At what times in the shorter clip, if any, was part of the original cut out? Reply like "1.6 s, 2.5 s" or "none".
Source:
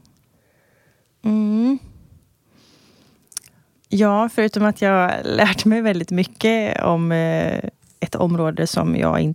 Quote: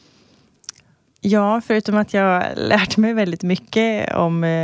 none

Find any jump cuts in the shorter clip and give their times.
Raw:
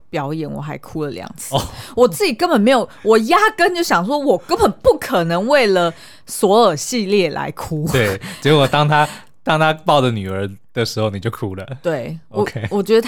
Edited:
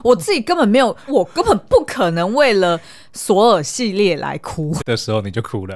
1.1 s, 4.8 s

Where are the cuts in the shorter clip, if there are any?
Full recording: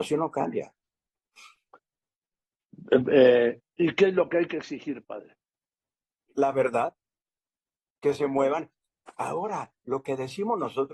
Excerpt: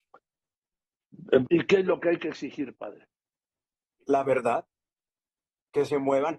1.5 s

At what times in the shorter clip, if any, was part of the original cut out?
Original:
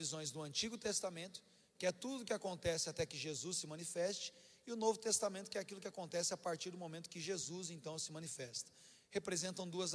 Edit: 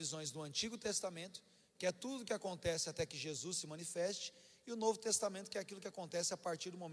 none

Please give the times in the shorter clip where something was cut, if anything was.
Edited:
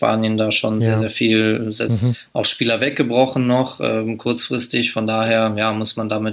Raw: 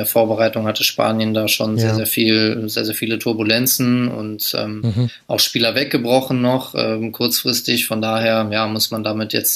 1.9 s

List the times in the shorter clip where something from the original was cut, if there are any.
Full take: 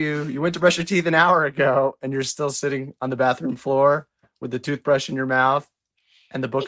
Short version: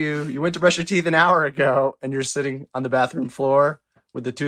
2.2 s

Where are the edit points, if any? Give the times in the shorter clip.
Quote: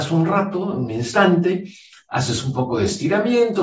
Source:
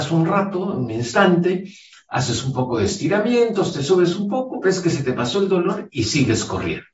none

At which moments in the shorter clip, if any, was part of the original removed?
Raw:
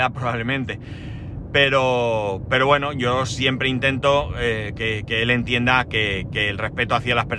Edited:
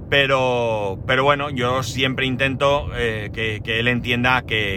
none

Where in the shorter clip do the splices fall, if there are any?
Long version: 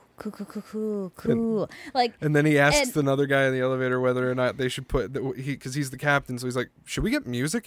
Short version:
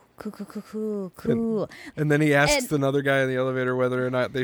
1.9 s

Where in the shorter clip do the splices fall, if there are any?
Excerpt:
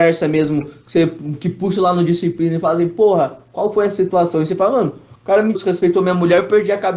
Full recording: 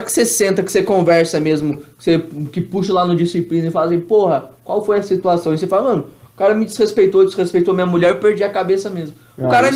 5.5 s

